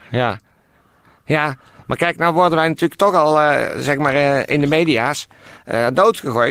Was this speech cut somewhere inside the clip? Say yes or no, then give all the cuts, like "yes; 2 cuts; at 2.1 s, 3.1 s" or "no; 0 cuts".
no; 0 cuts